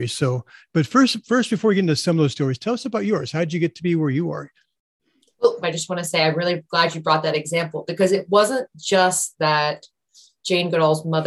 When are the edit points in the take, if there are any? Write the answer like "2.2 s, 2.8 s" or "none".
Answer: 5.6 s